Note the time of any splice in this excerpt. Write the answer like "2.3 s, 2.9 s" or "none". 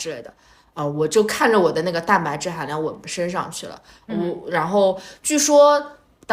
3.0 s